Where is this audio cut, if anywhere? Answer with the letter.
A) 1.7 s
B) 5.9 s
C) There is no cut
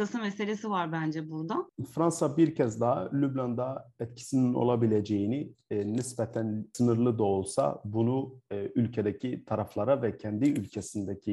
A